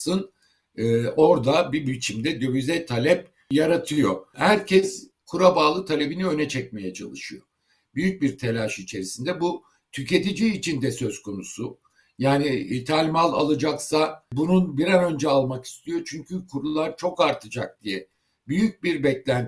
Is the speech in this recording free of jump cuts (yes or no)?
yes